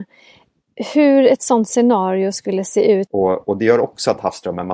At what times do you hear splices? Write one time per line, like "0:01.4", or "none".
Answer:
0:03.1

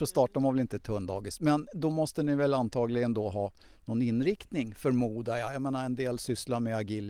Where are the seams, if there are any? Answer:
none

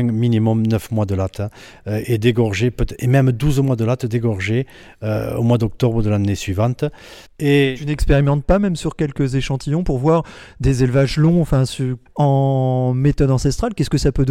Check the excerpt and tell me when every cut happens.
0:07.3
0:12.1

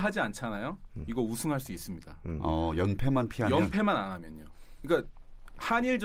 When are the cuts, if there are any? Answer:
none

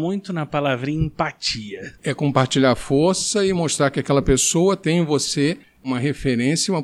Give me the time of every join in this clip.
0:02.0

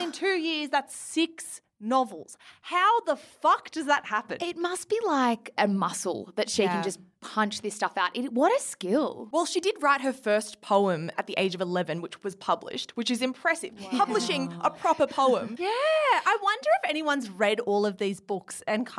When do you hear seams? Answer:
none

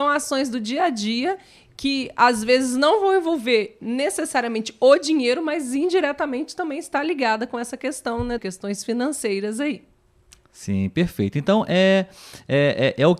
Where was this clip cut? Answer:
0:08.4

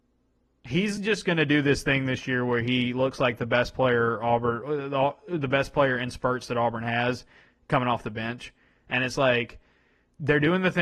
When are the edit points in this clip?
none

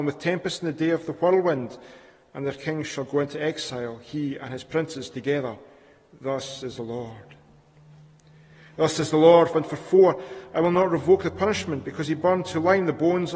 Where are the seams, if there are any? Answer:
0:09.5

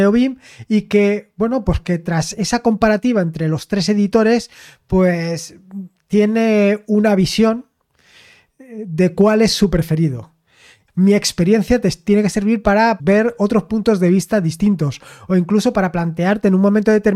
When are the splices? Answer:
0:10.9
0:13.0

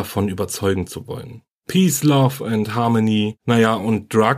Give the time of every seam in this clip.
0:01.5

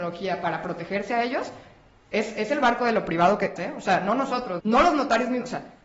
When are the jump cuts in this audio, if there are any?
0:03.6
0:04.6

